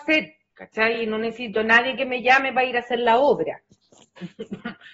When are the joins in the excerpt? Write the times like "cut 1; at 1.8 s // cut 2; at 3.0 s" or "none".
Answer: none